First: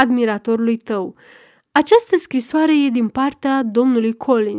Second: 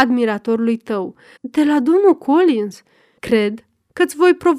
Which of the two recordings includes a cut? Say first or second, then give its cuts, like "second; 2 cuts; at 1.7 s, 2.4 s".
second; 2 cuts; at 1.4 s, 3.2 s